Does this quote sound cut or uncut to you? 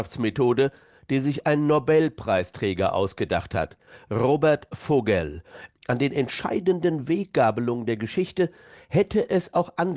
cut